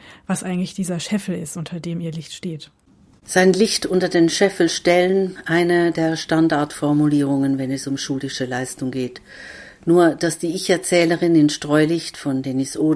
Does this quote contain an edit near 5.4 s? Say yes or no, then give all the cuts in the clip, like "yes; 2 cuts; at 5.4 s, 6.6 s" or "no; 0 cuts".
no; 0 cuts